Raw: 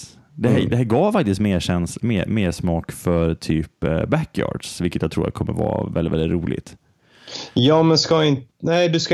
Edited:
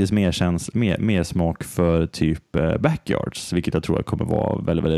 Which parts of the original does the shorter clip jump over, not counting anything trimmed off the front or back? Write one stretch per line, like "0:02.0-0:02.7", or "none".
none